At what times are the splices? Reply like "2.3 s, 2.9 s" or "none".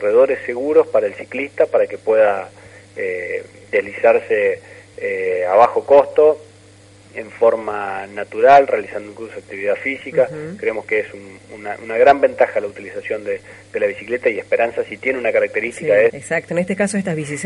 16.1 s